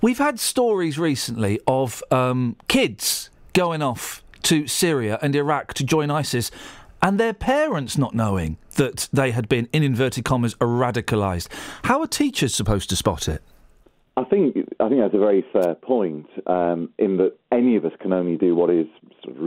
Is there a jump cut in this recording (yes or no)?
no